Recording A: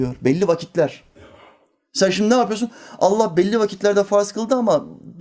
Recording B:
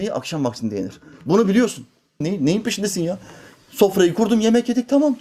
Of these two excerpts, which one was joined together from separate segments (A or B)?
B